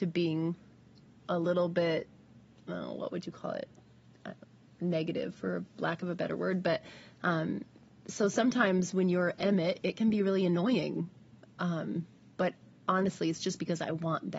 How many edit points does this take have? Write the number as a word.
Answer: zero